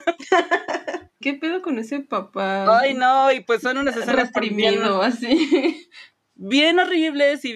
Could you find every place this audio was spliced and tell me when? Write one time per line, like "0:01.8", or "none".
0:01.2